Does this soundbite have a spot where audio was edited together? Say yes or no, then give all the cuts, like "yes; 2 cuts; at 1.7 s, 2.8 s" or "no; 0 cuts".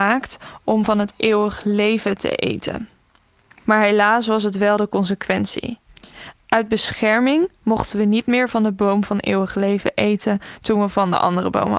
yes; 1 cut; at 3.6 s